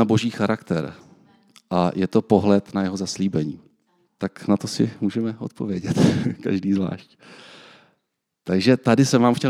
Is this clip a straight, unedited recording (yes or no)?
no